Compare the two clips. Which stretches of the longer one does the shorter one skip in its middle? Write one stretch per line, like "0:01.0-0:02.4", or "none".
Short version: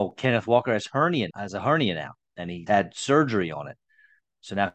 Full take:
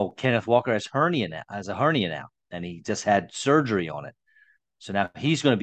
0:01.3-0:01.4
0:02.8-0:03.0